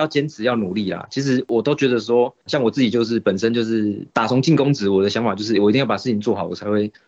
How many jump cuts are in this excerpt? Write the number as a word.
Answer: one